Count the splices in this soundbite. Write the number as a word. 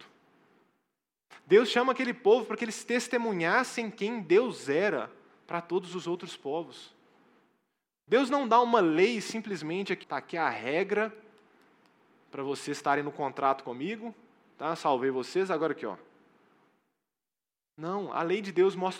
one